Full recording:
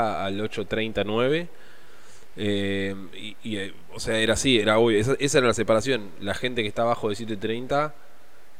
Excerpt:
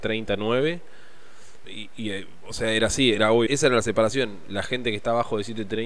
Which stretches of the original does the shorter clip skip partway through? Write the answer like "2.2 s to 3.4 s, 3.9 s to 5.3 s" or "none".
2.3 s to 3.1 s, 4.9 s to 5.2 s